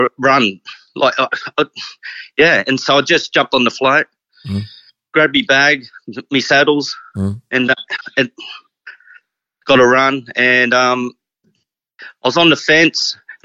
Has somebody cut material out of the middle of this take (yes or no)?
no